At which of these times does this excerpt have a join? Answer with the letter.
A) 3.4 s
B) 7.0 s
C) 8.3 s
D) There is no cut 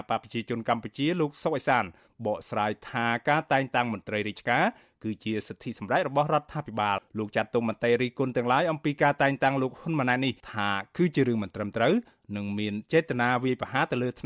B